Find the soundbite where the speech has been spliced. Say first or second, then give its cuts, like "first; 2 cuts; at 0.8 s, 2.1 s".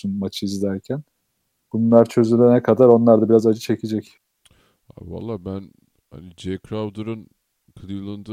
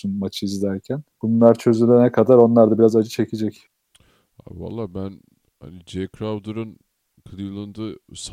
second; 1 cut; at 1.1 s